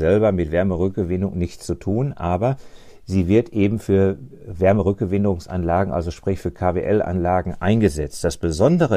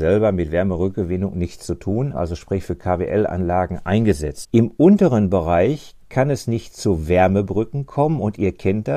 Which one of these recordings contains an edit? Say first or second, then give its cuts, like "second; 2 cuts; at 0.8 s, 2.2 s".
second; 2 cuts; at 2.1 s, 4.4 s